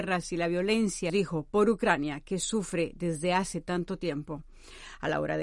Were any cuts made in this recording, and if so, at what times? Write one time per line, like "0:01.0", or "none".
0:01.1